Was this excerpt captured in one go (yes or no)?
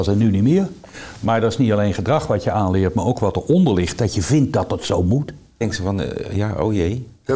no